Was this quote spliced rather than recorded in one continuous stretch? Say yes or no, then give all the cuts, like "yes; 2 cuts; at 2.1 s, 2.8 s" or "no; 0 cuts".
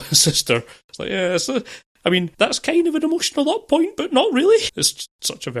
yes; 2 cuts; at 2.3 s, 4.7 s